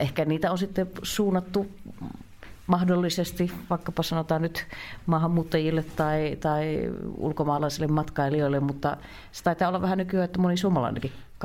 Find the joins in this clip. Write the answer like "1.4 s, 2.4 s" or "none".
none